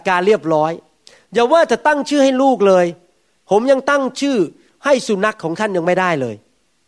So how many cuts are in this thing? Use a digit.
1